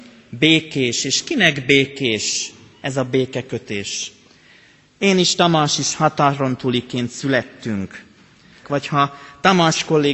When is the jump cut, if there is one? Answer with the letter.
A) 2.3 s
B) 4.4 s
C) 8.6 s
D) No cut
C